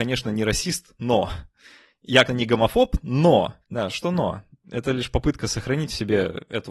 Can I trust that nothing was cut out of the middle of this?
no; 2 cuts; at 2.3 s, 3.6 s

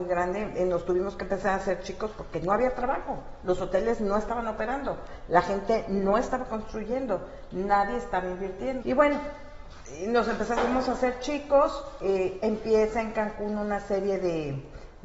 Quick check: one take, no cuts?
no; 1 cut; at 8.8 s

